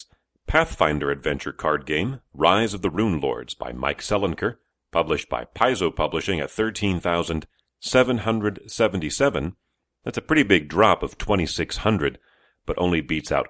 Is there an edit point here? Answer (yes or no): no